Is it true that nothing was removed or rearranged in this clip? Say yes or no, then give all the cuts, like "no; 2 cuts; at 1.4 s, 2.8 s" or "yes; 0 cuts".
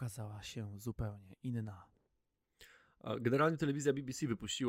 yes; 0 cuts